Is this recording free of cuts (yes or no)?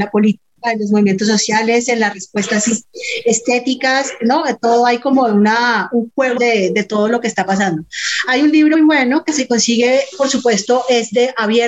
no